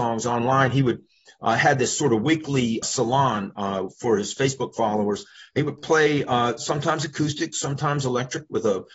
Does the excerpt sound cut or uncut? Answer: cut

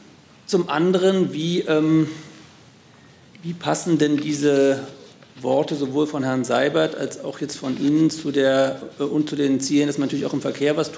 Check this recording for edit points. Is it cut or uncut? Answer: uncut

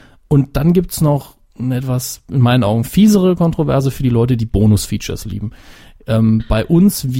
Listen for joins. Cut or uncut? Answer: uncut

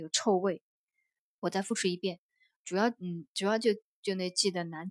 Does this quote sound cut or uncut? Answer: cut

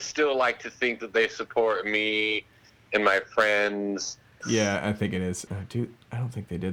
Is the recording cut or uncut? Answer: cut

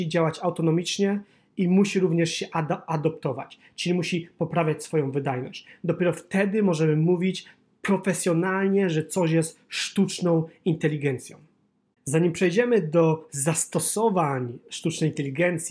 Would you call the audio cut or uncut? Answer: uncut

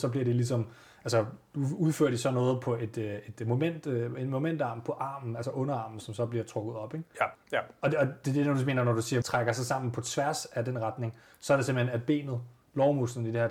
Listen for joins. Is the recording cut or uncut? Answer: cut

